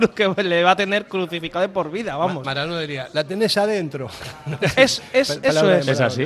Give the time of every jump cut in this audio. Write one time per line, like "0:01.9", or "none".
none